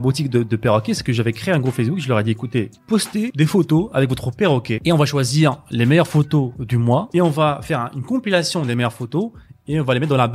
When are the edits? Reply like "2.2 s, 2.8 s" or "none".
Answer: none